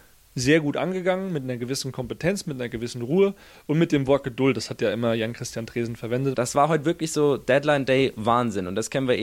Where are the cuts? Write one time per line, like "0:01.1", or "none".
0:06.3